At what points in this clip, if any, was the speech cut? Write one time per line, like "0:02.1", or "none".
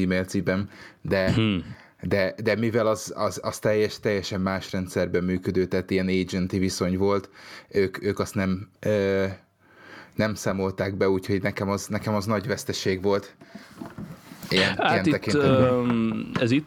0:08.8